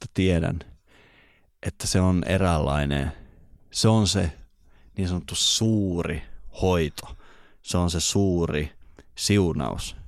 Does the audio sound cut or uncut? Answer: uncut